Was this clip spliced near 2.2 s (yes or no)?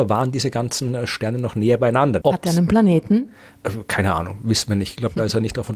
yes